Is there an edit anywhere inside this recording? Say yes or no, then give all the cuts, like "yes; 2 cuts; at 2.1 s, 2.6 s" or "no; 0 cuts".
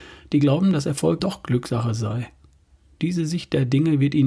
yes; 1 cut; at 1.2 s